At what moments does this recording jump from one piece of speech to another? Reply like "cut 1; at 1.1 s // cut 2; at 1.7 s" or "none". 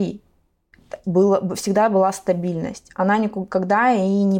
none